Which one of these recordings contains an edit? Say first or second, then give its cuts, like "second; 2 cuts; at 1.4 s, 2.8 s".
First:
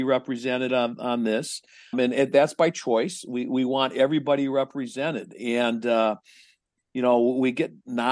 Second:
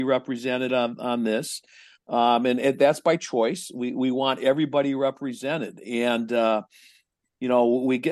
first; 1 cut; at 1.9 s